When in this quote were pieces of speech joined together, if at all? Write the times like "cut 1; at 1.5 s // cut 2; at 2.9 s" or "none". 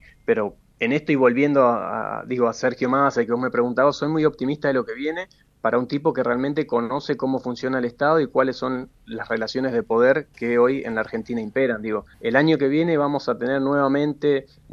cut 1; at 12.1 s